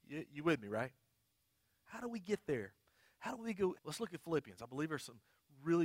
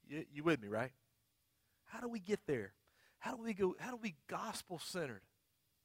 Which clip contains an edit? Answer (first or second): first